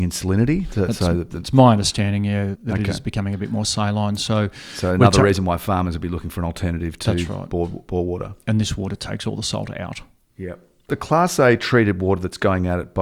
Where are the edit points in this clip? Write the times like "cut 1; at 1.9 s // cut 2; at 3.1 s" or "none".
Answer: cut 1; at 2.6 s